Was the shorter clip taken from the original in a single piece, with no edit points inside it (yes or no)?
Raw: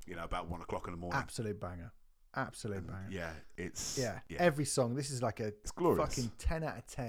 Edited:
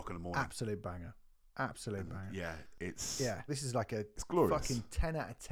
no